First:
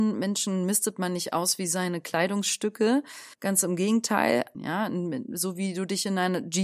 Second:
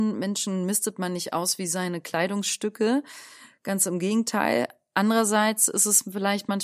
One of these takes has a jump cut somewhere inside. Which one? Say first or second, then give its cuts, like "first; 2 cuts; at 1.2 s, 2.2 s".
first; 2 cuts; at 3.3 s, 4.5 s